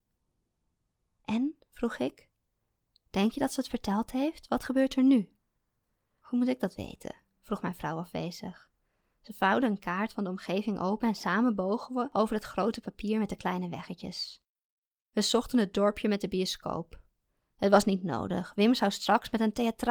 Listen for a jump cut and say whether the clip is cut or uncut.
uncut